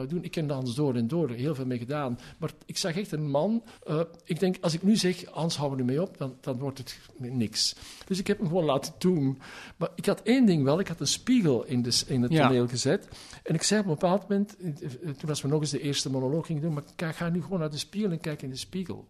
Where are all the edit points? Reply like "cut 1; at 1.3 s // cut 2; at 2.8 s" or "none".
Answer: cut 1; at 3.8 s

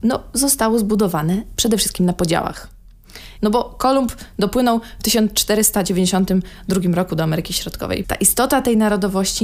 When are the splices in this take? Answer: cut 1; at 3.4 s // cut 2; at 8.0 s

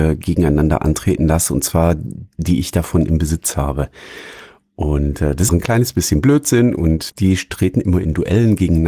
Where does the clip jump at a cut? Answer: cut 1; at 2.4 s // cut 2; at 5.5 s // cut 3; at 7.1 s

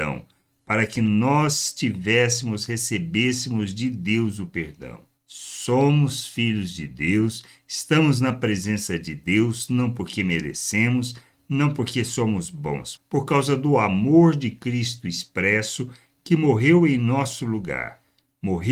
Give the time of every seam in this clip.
cut 1; at 5.2 s // cut 2; at 13.0 s

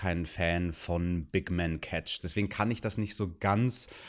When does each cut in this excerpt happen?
cut 1; at 2.2 s

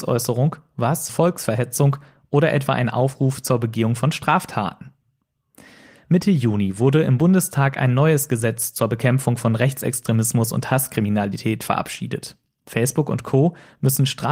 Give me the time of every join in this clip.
cut 1; at 1.1 s

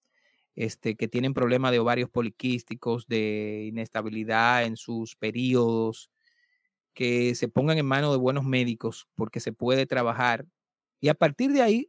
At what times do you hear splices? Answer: cut 1; at 10.8 s

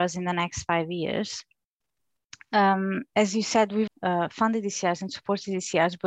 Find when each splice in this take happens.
cut 1; at 3.9 s

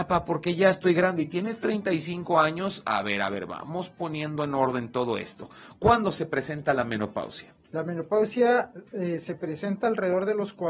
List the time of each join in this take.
none

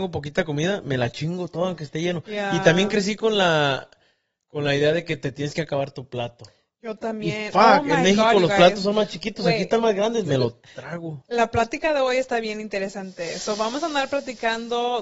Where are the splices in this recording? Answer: cut 1; at 10.2 s

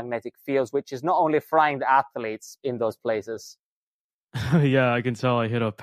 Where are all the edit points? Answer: cut 1; at 2.6 s

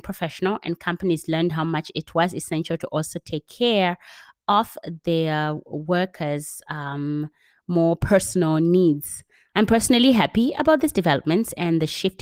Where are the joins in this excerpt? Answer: cut 1; at 9.5 s

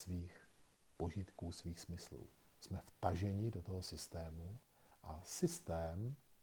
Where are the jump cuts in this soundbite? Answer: cut 1; at 2.4 s

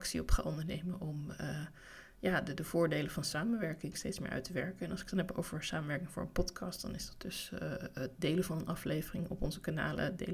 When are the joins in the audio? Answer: none

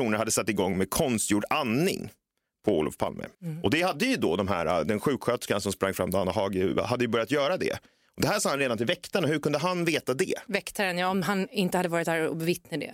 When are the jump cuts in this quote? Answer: cut 1; at 3.3 s

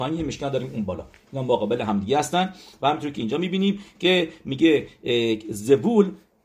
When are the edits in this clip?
none

